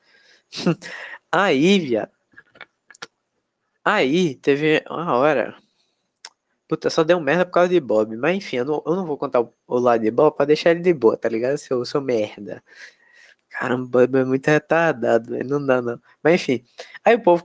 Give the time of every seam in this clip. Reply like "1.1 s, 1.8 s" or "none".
none